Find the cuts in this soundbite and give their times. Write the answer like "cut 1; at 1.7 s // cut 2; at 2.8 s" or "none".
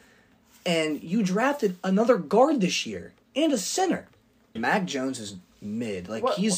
cut 1; at 4.6 s